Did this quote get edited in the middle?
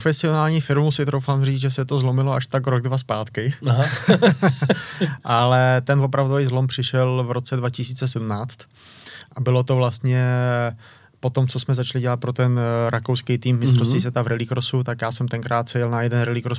no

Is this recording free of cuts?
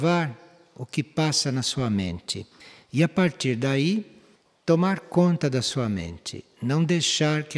yes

